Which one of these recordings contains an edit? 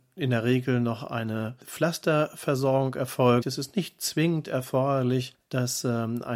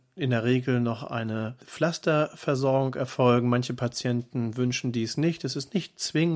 first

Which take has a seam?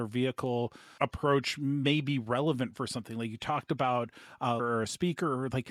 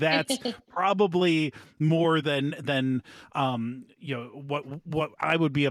first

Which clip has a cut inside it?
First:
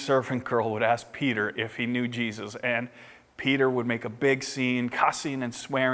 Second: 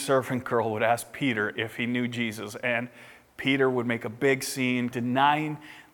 second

